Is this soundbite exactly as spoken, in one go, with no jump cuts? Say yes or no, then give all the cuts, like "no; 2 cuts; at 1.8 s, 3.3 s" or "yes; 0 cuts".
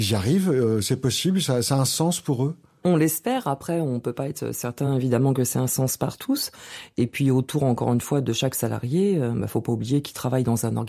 yes; 0 cuts